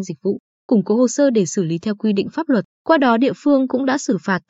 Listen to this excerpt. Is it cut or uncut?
cut